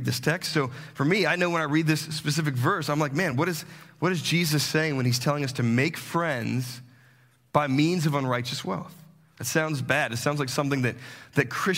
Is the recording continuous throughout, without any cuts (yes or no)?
yes